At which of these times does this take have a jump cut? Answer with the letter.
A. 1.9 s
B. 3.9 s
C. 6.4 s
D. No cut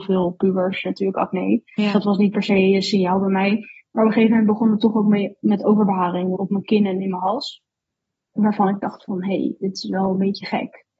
C